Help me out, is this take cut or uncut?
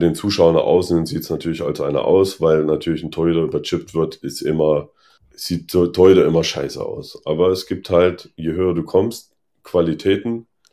uncut